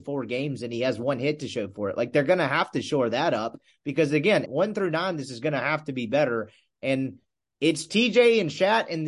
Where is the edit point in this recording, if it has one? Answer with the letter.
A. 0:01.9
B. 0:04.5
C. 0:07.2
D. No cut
B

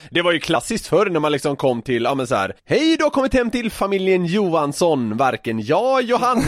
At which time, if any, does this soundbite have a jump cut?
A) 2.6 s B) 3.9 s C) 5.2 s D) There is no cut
D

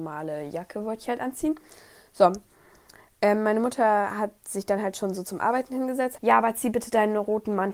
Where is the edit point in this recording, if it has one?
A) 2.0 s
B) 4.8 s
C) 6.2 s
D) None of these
C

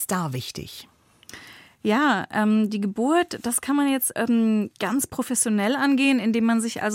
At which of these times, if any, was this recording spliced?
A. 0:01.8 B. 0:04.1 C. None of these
B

